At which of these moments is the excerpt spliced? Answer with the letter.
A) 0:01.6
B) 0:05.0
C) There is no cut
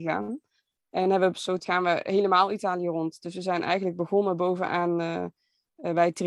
A